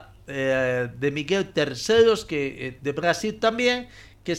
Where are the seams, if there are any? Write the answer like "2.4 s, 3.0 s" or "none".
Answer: none